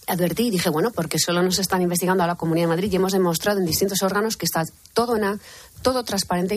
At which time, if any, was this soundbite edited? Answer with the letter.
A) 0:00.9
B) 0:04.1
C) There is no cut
A